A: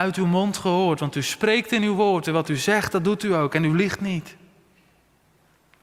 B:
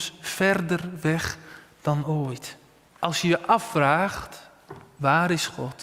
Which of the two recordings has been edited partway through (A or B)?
B